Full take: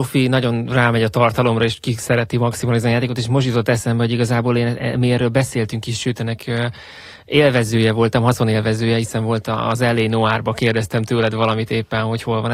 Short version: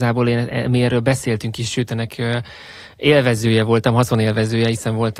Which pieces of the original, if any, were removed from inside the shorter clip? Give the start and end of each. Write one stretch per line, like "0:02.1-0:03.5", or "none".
none